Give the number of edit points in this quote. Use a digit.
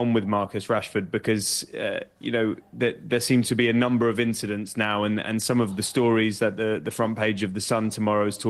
0